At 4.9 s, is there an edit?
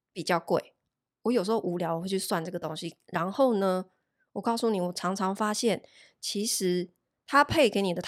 no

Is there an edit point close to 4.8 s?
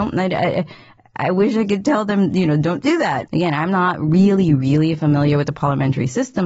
no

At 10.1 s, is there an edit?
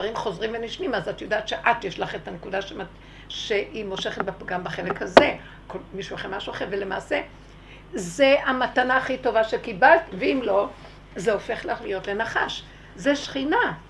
yes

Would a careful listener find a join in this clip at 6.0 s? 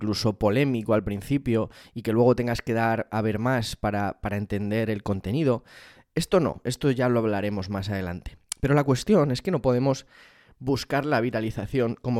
no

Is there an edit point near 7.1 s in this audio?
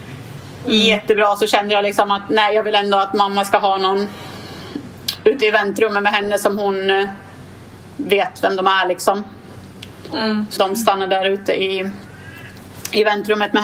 no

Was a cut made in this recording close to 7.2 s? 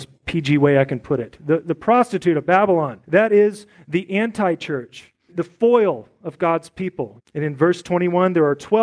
yes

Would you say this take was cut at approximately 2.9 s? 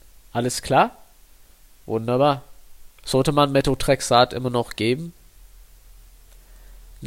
yes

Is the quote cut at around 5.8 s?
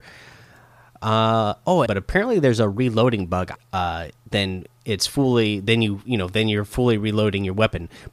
no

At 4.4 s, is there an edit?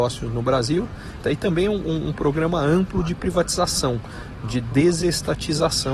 no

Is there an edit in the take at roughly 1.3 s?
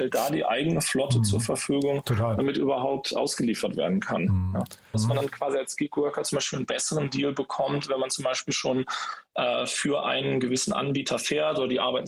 no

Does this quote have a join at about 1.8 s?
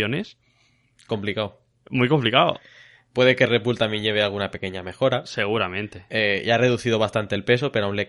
no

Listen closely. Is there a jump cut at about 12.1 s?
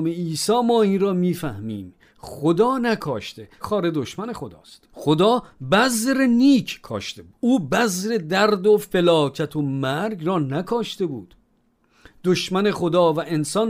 no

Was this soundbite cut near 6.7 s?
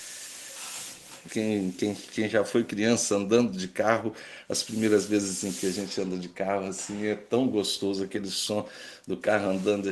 no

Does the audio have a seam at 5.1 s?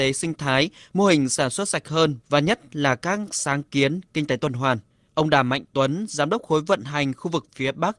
yes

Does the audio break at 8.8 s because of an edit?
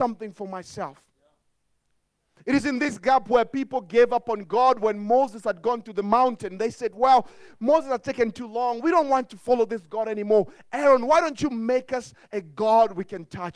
no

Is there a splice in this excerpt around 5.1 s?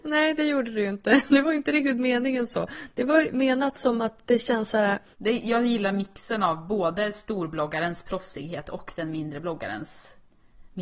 yes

